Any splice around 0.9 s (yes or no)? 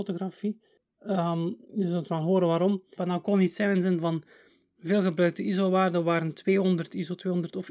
no